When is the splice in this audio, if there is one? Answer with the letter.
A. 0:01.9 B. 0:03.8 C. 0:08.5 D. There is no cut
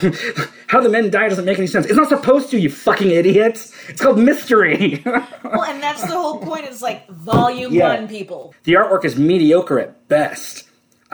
C